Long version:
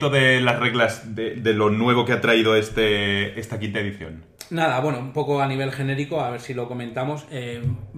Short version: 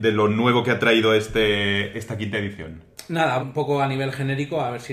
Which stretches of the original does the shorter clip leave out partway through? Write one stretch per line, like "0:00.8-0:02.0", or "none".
0:04.8-0:05.0